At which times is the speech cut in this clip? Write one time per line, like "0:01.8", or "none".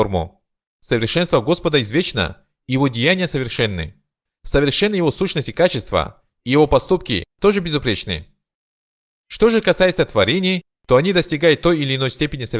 0:07.3